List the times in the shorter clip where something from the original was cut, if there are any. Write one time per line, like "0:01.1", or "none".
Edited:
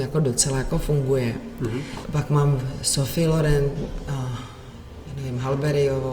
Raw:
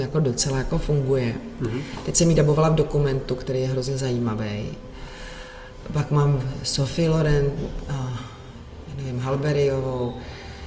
0:02.0